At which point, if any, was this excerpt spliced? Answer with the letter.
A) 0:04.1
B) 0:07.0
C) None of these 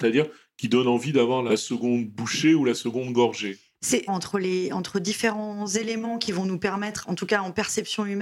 A